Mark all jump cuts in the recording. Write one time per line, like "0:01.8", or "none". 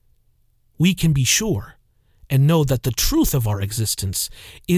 none